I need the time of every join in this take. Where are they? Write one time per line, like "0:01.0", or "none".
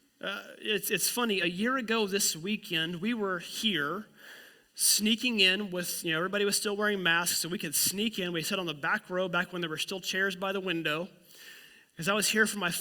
none